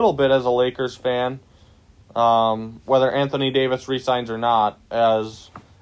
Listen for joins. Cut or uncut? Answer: uncut